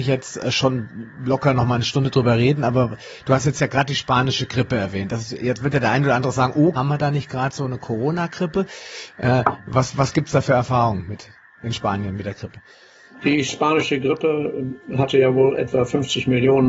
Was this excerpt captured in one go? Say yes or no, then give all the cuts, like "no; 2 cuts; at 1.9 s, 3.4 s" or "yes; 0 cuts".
no; 1 cut; at 6.8 s